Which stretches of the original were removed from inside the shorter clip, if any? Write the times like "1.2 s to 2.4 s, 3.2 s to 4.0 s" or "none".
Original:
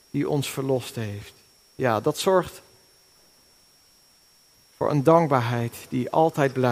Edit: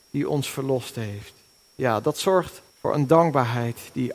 2.7 s to 4.6 s